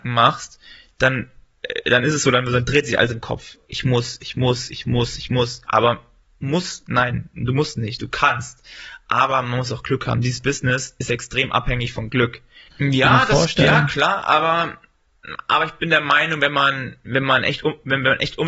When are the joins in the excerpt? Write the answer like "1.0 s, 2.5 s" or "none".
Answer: 12.7 s